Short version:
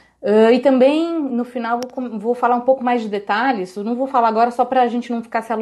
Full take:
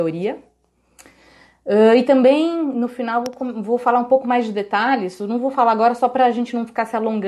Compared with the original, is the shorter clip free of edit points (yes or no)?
yes